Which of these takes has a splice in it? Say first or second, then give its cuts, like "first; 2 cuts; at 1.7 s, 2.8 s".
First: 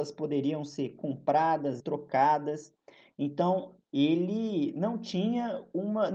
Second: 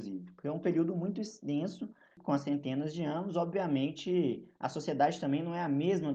first; 2 cuts; at 1.8 s, 3.8 s